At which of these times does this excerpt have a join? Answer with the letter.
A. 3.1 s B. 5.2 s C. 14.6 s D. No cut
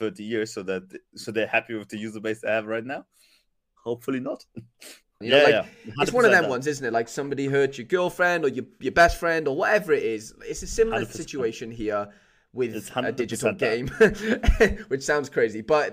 B